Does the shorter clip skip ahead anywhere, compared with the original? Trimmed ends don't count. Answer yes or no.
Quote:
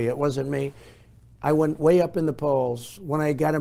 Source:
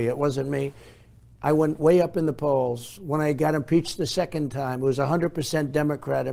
no